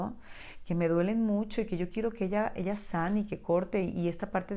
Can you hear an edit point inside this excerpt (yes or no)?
no